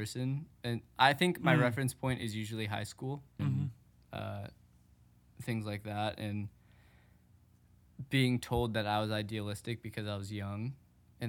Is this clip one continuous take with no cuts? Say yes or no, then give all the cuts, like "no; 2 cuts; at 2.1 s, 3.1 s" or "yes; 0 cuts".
no; 1 cut; at 3.4 s